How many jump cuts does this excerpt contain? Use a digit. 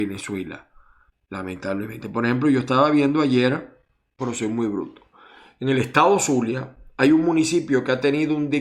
1